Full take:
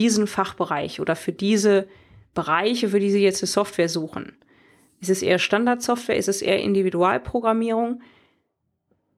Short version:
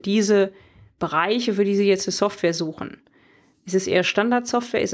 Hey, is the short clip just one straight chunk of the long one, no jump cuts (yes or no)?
yes